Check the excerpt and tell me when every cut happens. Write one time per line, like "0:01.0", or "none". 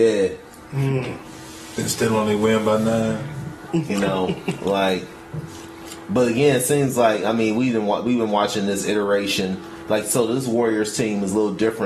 none